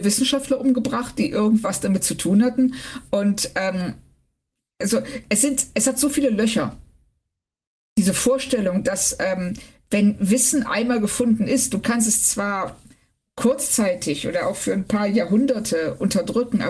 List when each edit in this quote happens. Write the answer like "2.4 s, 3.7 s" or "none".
none